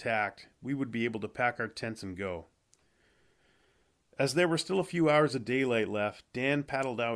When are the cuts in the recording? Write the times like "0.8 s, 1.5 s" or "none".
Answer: none